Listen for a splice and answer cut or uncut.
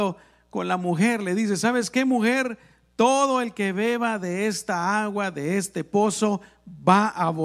uncut